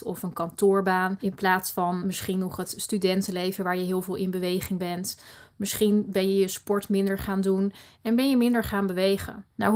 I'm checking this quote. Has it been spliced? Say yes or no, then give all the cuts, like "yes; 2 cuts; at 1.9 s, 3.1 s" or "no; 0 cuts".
no; 0 cuts